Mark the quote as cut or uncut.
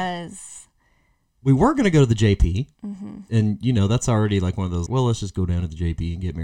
cut